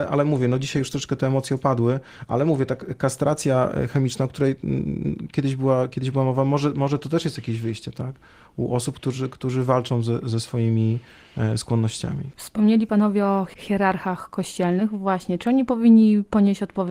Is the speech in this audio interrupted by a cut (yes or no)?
no